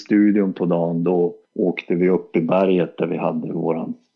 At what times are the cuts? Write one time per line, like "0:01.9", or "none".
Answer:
0:01.4